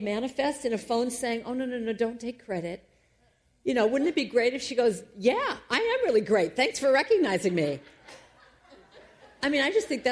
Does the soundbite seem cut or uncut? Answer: uncut